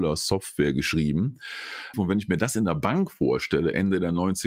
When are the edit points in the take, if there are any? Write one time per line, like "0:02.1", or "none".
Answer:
0:01.9

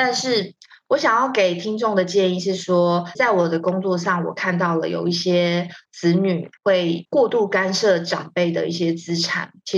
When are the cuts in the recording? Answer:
0:03.1
0:06.6

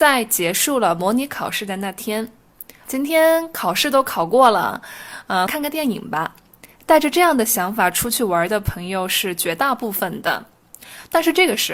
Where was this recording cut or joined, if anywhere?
0:02.8
0:05.5

